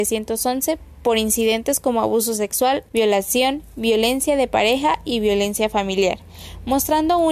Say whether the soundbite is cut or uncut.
cut